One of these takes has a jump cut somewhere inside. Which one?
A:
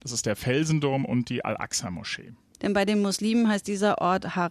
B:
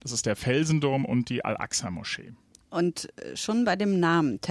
A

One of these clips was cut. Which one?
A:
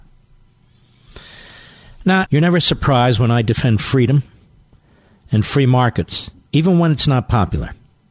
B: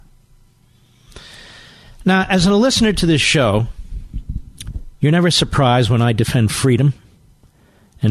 A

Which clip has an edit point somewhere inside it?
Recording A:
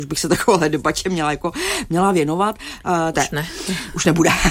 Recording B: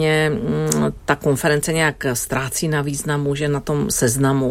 A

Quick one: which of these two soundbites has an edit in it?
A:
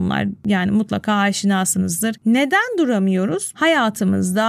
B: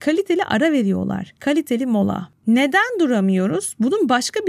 A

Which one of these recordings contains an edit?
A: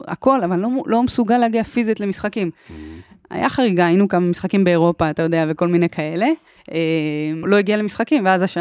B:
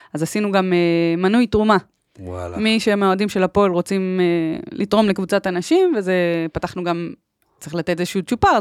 A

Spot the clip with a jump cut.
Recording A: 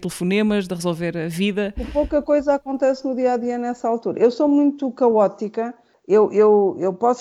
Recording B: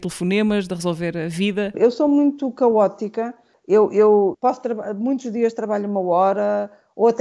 B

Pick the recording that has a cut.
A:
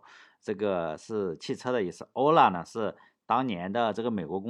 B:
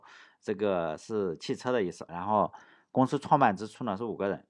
B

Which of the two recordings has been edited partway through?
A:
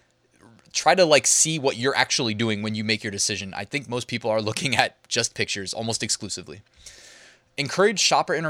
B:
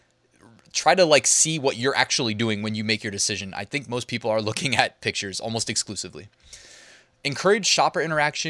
B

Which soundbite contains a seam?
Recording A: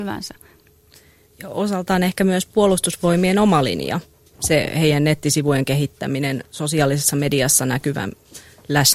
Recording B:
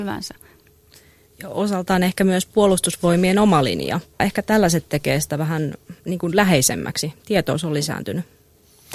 B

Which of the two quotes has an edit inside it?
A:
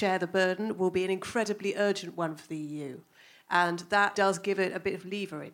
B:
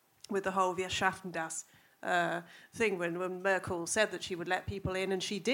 A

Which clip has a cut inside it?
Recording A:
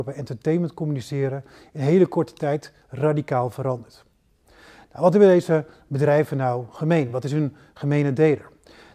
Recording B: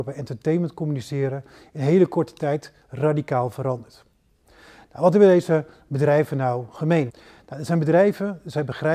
B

